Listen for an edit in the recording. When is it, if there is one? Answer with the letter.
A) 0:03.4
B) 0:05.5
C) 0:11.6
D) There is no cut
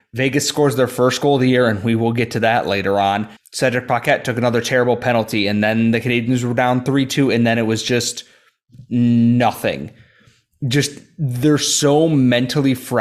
A